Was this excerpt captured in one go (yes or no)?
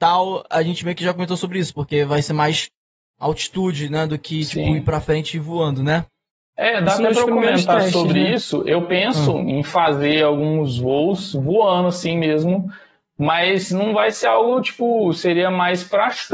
yes